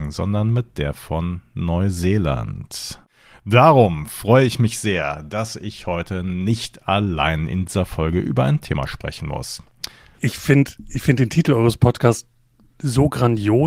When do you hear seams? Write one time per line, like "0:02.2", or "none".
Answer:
0:10.1